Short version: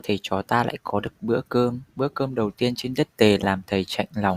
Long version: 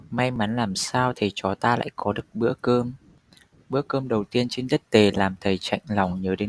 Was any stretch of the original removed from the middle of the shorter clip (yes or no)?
yes